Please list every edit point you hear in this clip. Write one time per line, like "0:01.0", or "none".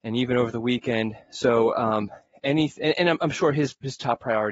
none